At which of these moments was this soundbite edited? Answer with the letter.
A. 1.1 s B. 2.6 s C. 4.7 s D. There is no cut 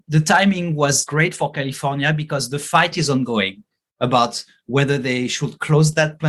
A